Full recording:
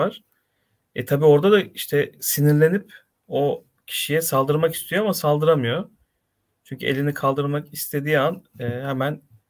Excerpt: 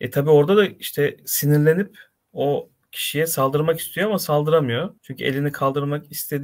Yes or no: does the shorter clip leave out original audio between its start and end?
yes